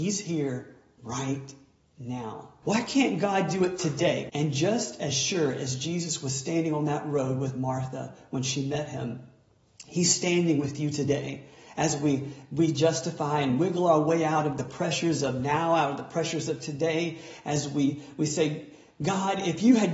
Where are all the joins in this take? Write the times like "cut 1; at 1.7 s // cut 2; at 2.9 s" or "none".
cut 1; at 2.6 s // cut 2; at 4.3 s